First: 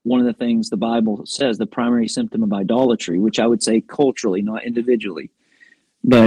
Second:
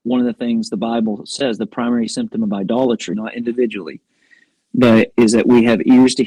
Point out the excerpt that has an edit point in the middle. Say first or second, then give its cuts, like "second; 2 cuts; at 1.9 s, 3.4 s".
second; 1 cut; at 3.1 s